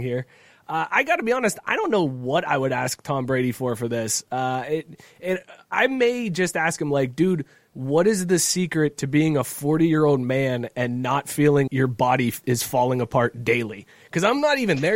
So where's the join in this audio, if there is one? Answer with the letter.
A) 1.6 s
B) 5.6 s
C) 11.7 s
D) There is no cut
C